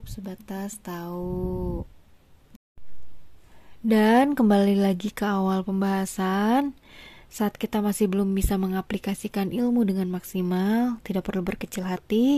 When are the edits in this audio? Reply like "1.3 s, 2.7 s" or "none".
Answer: none

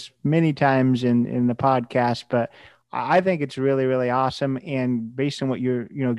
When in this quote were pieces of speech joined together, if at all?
none

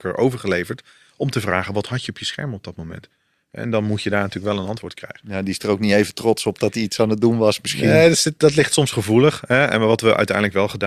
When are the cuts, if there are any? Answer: none

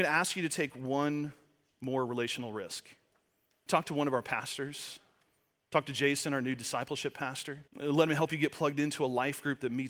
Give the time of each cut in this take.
3.7 s, 7.7 s

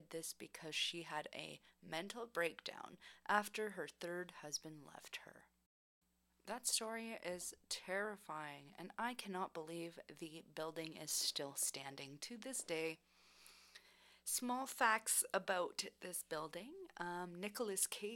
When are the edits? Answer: none

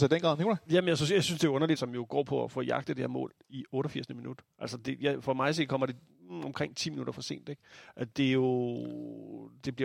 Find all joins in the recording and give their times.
1.7 s

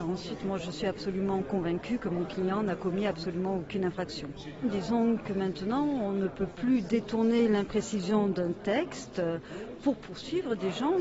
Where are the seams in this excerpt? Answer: none

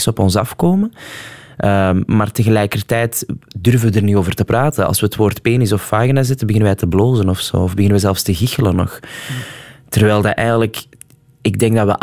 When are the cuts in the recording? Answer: none

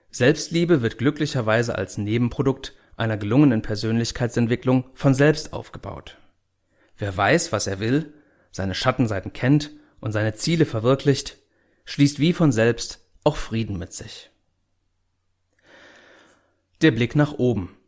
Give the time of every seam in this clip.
none

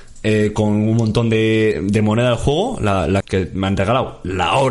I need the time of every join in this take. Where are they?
3.2 s

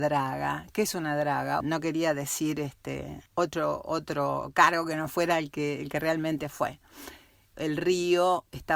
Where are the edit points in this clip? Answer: 1.6 s, 3.3 s, 7.5 s

